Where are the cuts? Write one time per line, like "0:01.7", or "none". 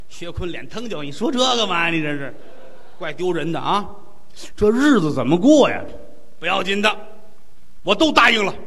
0:04.5
0:07.8